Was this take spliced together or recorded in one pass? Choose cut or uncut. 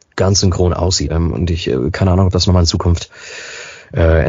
cut